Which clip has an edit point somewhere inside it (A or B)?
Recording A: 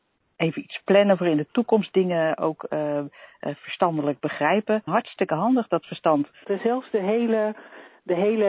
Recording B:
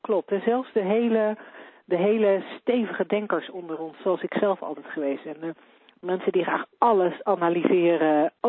A